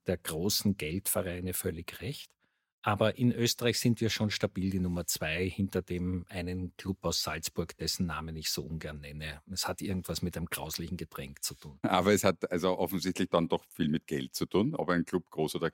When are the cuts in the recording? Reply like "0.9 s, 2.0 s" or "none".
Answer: none

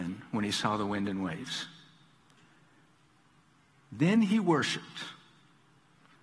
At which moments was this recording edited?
none

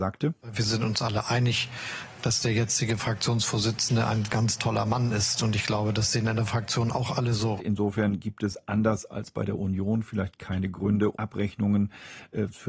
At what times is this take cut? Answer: 7.6 s, 11.1 s

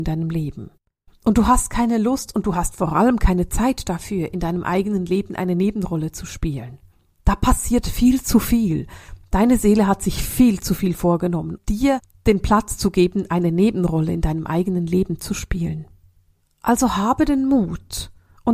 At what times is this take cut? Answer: 11.6 s

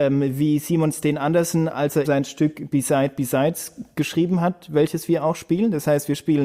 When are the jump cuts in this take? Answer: 2.0 s

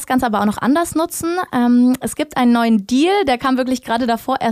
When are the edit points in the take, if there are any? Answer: none

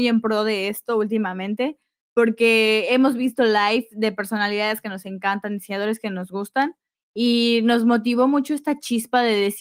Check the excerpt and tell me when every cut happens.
6.9 s

